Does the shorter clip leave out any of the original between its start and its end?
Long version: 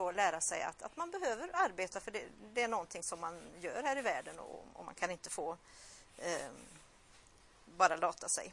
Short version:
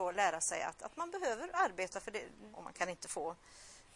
yes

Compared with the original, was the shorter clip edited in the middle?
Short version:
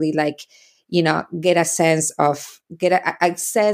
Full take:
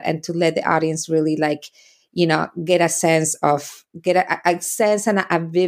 no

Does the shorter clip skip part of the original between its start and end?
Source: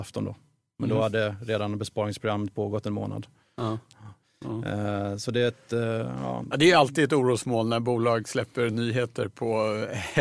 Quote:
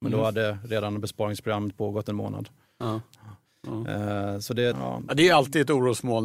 yes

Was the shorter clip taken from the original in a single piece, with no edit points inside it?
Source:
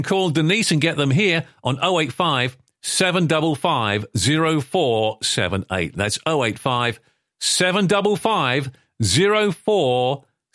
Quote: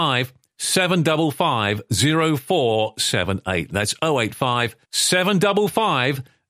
no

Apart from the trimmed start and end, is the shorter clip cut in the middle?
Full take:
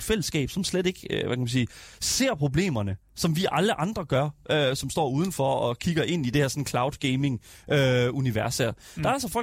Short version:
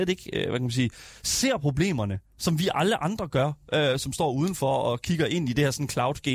no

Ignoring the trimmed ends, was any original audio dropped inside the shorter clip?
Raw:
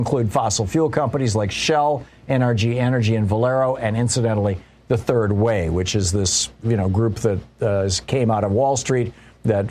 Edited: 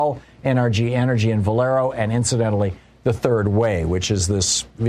no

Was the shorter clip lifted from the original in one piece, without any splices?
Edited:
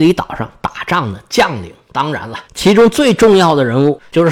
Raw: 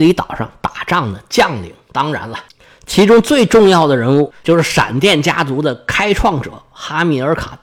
no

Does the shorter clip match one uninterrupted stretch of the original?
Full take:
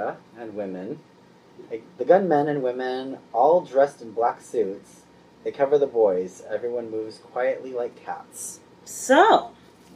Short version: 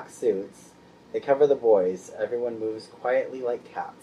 yes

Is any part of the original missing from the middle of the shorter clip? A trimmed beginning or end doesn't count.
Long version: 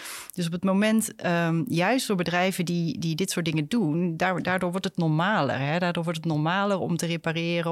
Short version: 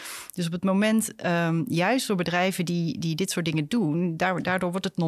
no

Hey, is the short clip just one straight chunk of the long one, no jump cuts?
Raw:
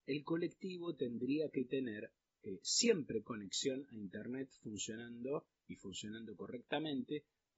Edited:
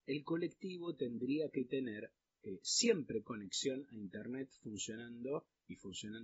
yes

